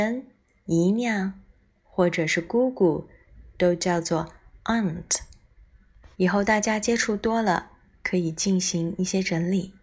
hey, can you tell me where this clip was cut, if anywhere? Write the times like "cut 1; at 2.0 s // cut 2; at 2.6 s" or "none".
cut 1; at 6.1 s